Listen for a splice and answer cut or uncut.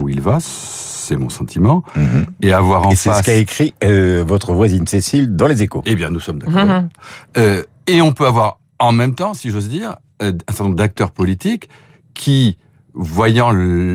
uncut